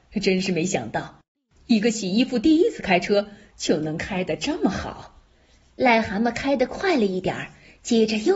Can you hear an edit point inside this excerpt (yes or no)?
no